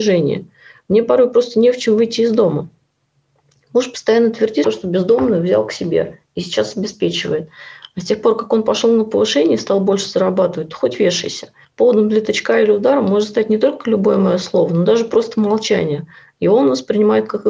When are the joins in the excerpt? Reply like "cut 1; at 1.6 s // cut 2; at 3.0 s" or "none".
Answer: cut 1; at 4.6 s // cut 2; at 11.6 s